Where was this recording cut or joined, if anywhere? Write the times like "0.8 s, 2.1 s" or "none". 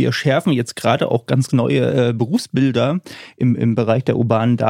3.6 s